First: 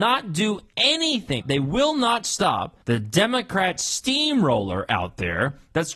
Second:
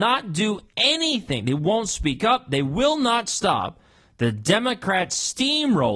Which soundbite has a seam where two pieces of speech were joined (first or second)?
first